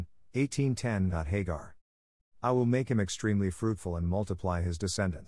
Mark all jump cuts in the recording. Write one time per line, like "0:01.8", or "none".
0:02.2